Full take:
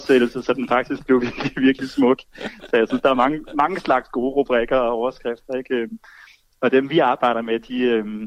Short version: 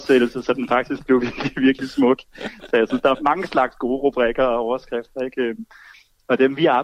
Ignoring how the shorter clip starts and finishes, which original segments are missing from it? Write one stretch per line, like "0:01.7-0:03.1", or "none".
0:03.1-0:03.5